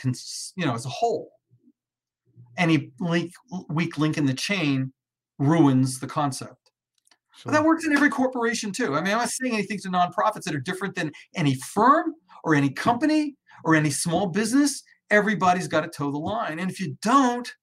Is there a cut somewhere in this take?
no; 0 cuts

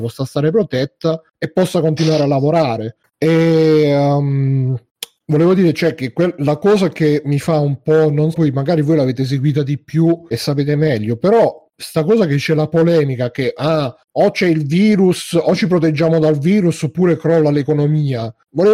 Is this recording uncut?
no; 3 cuts; at 3.0 s, 8.3 s, 10.3 s

